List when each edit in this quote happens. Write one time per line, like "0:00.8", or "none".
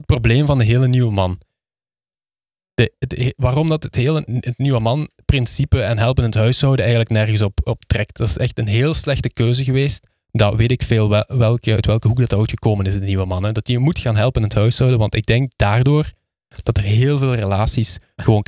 none